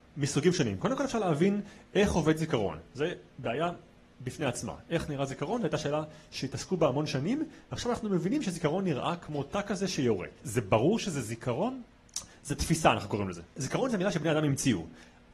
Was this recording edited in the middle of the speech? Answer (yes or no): no